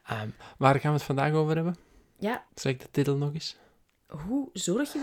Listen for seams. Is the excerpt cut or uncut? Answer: cut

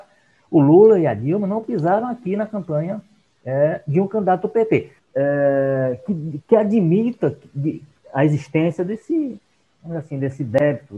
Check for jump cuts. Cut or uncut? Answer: cut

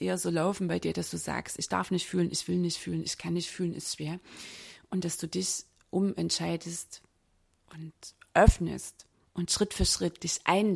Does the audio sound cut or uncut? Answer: cut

